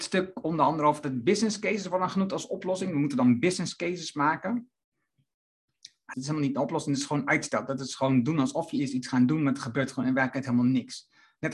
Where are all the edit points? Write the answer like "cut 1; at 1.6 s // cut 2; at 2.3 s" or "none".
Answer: cut 1; at 6.1 s